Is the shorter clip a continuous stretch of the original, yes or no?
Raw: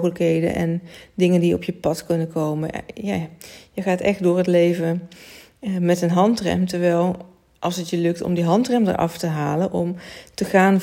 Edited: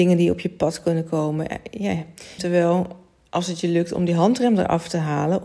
no